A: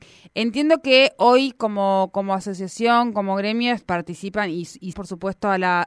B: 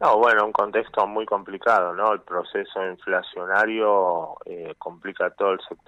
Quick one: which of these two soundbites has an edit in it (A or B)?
A